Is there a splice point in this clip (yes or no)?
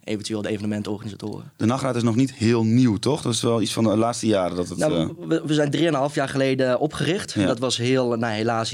no